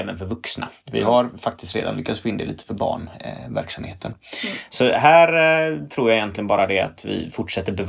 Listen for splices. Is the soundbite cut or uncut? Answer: uncut